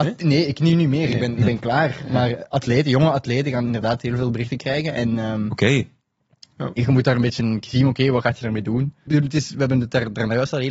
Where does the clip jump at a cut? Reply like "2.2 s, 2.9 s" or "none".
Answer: 9.1 s